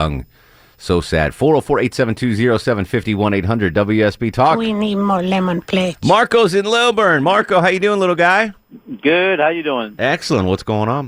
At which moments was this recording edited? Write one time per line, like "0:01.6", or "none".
none